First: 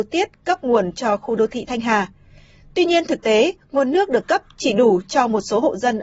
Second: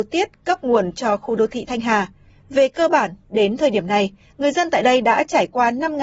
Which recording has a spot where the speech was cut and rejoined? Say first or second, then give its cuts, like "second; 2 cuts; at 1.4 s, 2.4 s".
second; 1 cut; at 2.3 s